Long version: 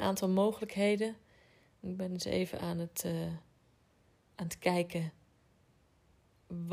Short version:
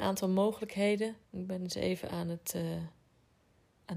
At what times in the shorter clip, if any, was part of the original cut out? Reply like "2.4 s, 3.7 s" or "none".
1.2 s